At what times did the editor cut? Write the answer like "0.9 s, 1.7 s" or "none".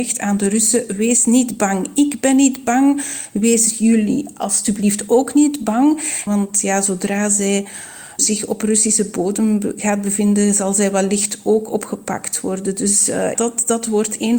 6.3 s, 13.3 s